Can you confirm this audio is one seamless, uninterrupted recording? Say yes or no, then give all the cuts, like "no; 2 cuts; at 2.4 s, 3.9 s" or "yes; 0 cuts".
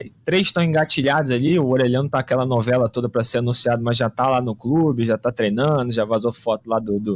yes; 0 cuts